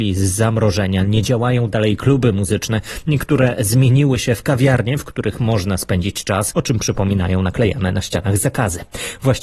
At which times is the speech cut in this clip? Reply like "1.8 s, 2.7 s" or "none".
6.5 s